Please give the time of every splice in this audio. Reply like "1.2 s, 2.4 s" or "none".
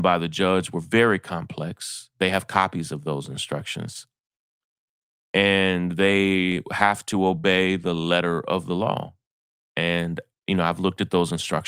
none

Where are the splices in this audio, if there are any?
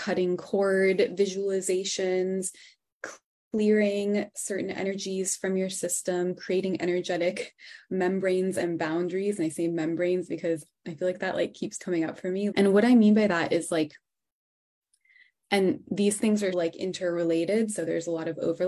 12.5 s, 16.5 s

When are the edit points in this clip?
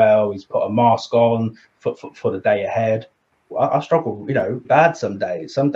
3.5 s, 4.6 s

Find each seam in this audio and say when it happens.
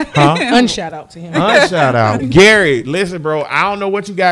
2.2 s

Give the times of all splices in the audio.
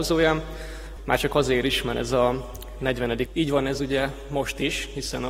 1.0 s, 3.3 s

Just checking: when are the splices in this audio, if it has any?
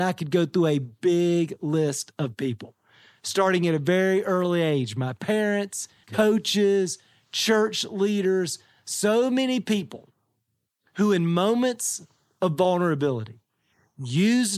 6.0 s

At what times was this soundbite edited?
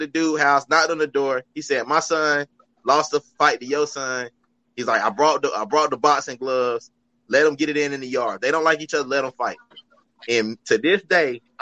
none

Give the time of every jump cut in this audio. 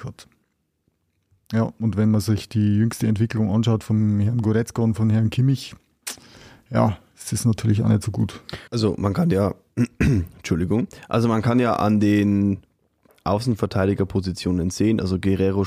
8.7 s

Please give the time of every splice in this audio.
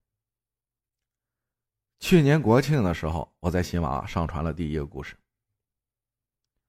none

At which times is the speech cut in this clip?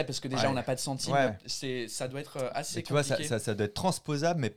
1.3 s

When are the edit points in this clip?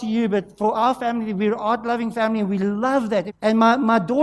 3.3 s

